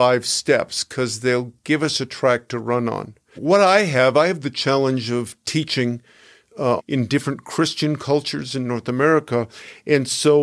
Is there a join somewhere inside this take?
yes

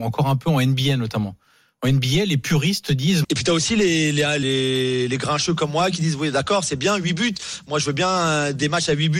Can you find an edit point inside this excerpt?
yes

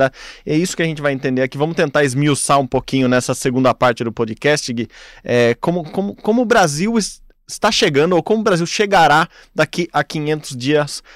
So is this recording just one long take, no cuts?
yes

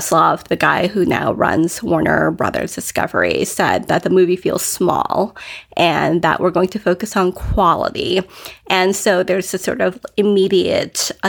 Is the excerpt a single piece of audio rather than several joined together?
yes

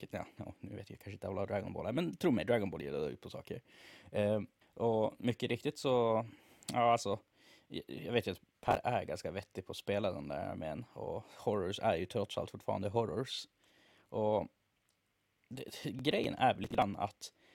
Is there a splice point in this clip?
yes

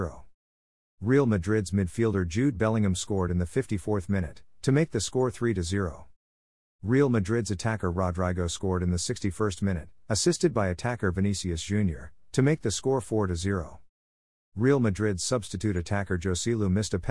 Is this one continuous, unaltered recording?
yes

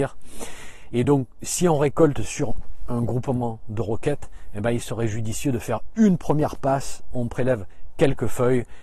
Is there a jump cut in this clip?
no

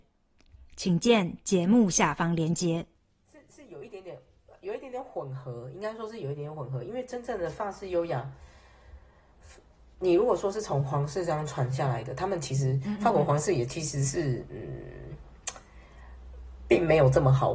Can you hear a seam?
no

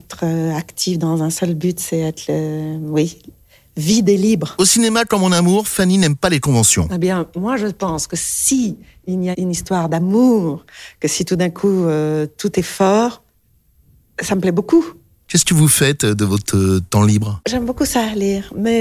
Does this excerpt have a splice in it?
yes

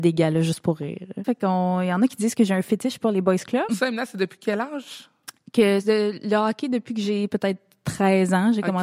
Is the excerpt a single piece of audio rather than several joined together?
no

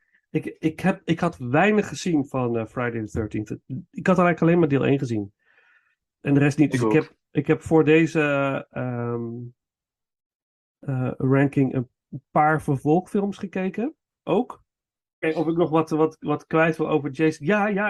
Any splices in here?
yes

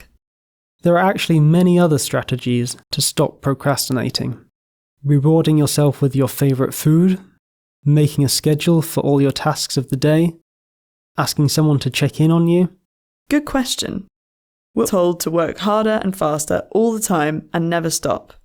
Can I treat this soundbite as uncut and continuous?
no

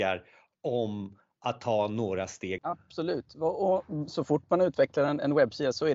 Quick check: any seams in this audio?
yes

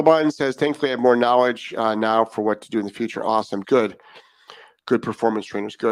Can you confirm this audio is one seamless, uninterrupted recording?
no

